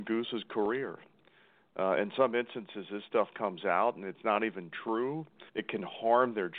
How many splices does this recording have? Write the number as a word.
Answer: one